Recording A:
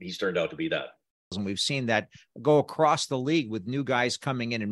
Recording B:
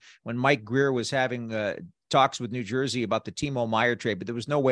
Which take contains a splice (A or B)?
A